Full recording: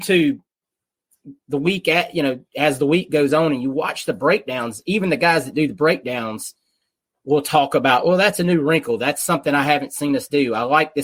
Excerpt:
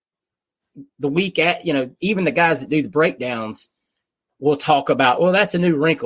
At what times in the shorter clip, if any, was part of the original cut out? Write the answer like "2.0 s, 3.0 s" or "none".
2.0 s